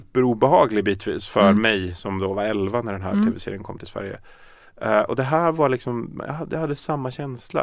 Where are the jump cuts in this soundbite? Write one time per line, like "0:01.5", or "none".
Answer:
none